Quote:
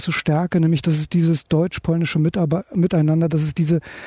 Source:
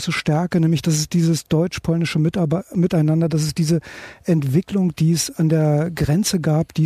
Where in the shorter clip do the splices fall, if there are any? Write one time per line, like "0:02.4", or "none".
none